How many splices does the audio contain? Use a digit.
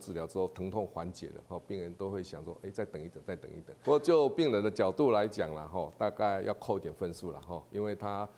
1